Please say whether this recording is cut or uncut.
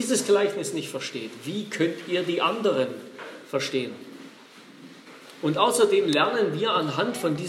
uncut